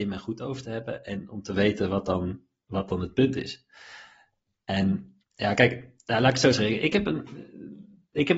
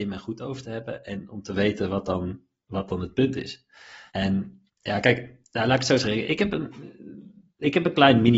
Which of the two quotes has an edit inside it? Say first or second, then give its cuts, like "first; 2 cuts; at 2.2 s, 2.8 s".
second; 1 cut; at 4.1 s